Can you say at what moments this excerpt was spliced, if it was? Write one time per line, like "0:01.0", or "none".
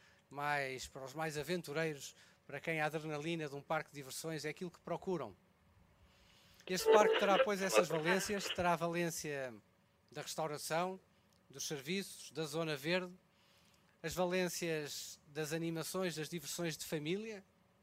0:06.7